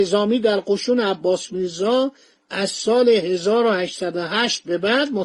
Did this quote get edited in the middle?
no; 0 cuts

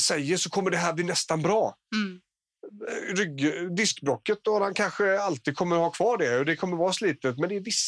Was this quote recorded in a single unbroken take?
yes; 0 cuts

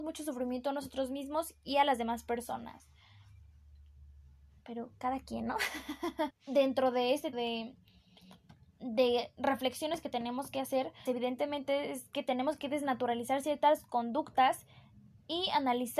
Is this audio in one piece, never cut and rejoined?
no; 3 cuts; at 6.3 s, 7.3 s, 11.1 s

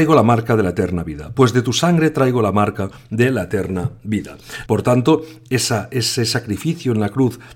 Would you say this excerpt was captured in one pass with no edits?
no; 1 cut; at 4.7 s

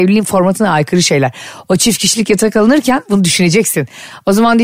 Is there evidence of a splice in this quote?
no; 0 cuts

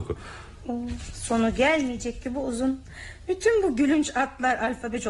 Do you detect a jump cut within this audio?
no; 0 cuts

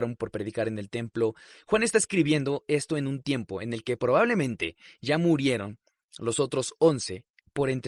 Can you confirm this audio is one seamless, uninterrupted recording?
yes; 0 cuts

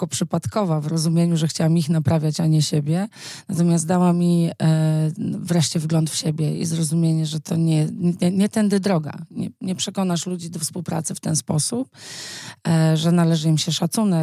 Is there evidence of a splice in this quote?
no; 0 cuts

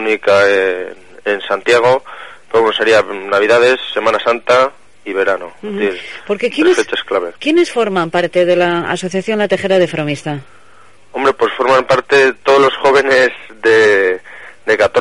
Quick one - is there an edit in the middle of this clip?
no; 0 cuts

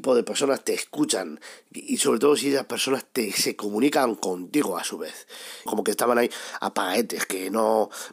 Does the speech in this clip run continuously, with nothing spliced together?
no; 1 cut; at 5.7 s

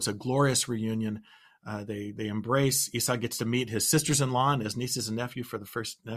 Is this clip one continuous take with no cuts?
yes; 0 cuts

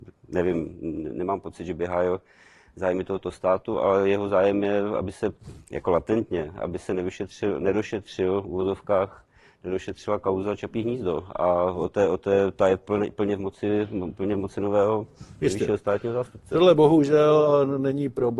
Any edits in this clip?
no; 0 cuts

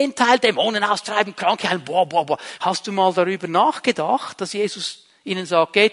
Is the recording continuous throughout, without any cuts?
no; 1 cut; at 2.6 s

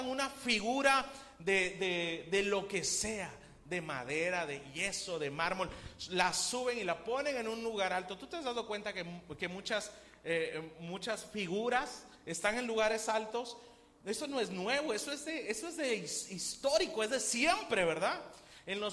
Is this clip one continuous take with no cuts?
yes; 0 cuts

